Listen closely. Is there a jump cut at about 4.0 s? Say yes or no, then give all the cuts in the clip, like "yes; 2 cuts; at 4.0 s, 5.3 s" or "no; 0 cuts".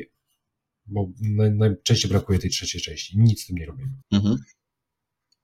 yes; 1 cut; at 4.0 s